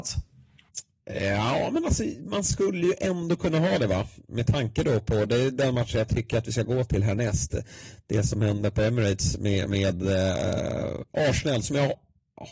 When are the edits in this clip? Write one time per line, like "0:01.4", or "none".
none